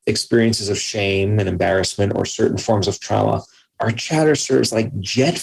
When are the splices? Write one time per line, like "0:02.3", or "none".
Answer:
0:03.7